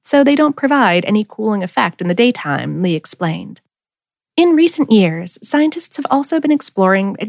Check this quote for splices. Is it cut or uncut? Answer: uncut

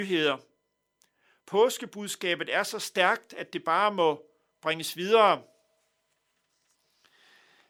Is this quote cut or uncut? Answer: uncut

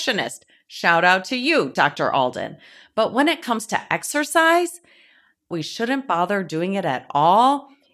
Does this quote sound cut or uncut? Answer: cut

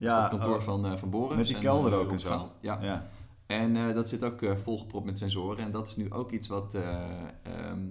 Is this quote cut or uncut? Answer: uncut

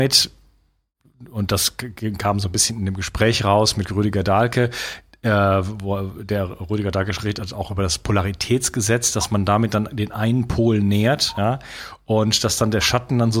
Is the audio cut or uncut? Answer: uncut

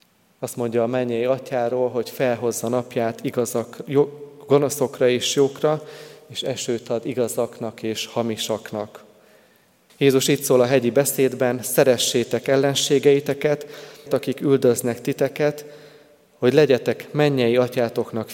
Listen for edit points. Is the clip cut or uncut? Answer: cut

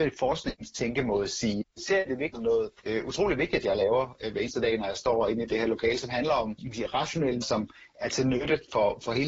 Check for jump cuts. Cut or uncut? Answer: cut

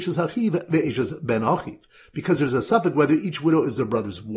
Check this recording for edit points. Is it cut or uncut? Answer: uncut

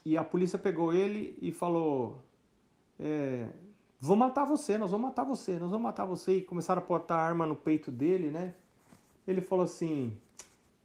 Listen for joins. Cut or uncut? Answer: uncut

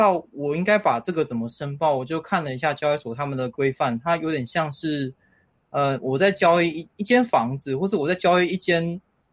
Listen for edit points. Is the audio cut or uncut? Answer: uncut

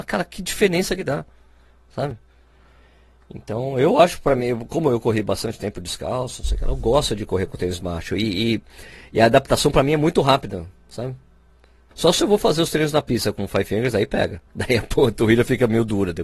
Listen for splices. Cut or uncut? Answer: cut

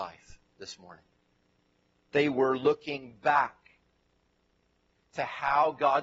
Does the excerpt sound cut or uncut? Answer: cut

